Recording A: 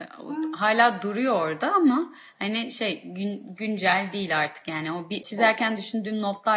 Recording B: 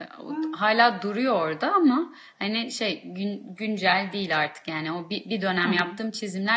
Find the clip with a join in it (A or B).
A